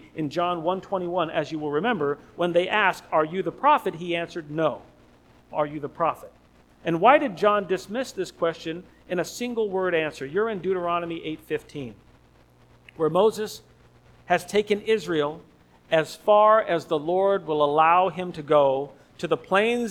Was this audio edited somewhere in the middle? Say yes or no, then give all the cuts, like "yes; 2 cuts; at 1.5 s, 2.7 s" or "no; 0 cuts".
yes; 1 cut; at 5.5 s